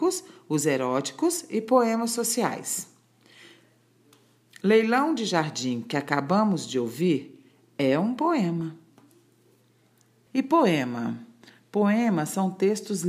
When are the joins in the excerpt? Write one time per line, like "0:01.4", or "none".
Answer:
0:10.3